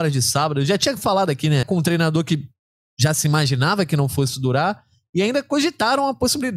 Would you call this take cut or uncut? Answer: cut